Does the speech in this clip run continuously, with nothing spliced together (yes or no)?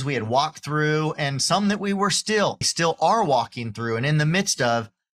no